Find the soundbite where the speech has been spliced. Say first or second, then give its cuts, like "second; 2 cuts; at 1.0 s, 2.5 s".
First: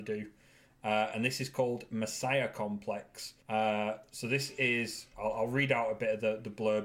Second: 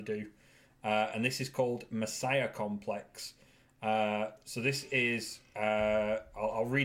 first; 2 cuts; at 3.4 s, 5.1 s